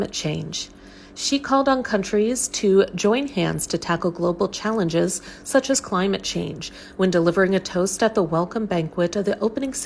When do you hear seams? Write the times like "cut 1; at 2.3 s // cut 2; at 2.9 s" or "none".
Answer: none